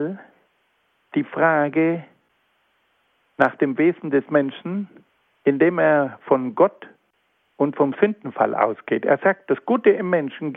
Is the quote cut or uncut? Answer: uncut